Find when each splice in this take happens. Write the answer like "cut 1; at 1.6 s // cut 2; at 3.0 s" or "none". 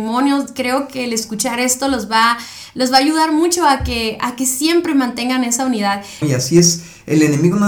cut 1; at 6.2 s

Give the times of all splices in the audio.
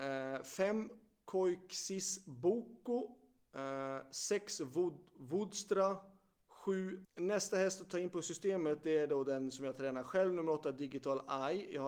cut 1; at 7.0 s

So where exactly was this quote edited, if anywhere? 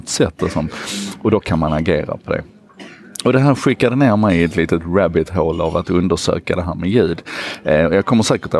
none

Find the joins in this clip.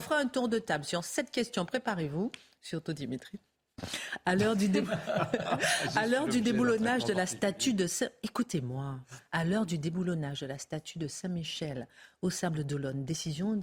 none

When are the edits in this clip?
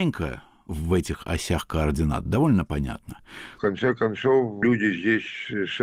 cut 1; at 3.6 s

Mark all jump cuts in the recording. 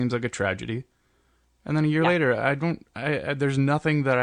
none

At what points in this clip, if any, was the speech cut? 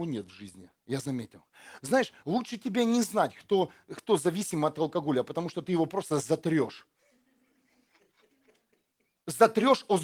cut 1; at 1.8 s

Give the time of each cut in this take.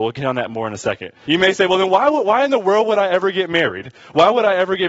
cut 1; at 1.2 s

